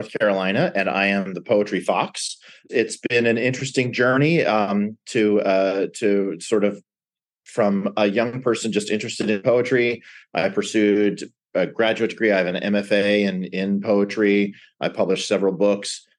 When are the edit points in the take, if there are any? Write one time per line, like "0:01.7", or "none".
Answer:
none